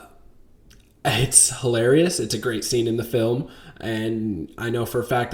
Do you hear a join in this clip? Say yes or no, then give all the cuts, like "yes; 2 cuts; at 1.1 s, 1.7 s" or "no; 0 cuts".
no; 0 cuts